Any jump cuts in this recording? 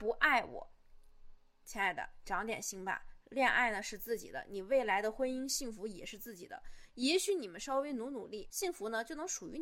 no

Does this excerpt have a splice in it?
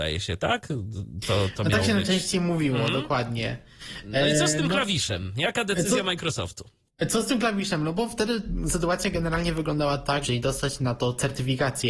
yes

